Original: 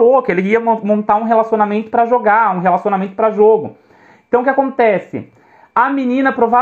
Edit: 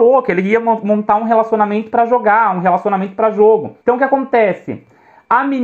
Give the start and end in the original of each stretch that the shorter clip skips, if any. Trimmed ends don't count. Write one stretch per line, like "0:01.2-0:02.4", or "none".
0:03.8-0:04.2